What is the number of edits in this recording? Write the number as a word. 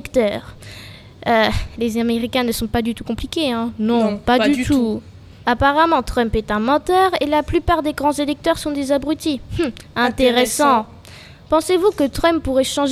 one